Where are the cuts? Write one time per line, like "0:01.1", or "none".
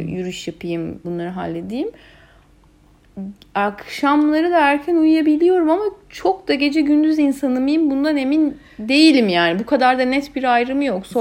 0:01.0